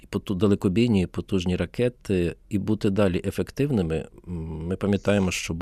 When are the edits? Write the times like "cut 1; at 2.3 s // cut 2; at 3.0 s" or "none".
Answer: none